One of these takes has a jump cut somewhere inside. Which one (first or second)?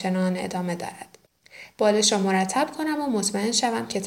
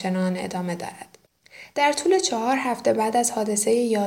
first